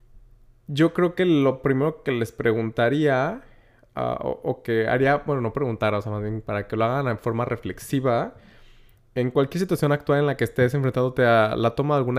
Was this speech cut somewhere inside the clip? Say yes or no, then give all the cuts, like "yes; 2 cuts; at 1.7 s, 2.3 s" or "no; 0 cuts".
no; 0 cuts